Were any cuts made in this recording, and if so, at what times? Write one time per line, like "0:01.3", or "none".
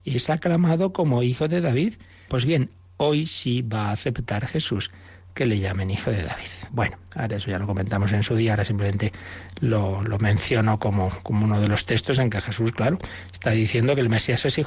0:02.3
0:06.7